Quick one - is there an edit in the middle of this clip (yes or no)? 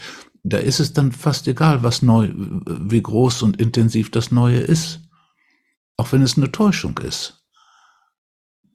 yes